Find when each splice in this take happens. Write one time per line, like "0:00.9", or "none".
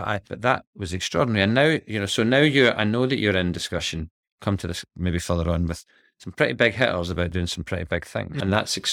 none